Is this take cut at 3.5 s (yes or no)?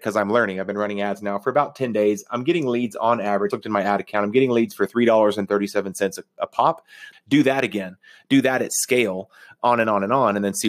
yes